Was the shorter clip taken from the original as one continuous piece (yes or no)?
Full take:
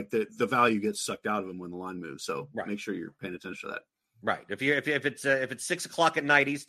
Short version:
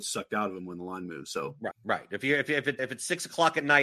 no